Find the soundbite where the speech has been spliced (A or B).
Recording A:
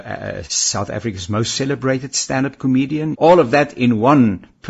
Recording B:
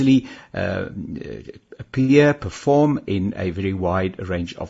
A